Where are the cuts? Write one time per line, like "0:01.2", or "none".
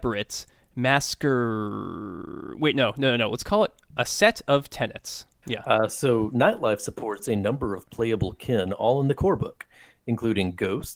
0:05.4